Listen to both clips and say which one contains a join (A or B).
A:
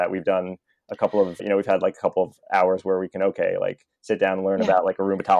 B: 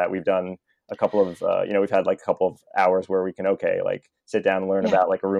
A